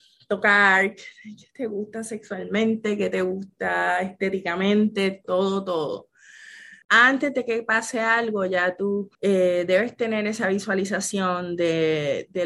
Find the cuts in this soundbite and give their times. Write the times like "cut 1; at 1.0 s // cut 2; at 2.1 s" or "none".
cut 1; at 5.2 s // cut 2; at 6.8 s // cut 3; at 9.1 s